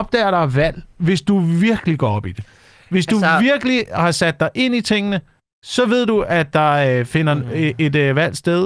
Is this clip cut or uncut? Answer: uncut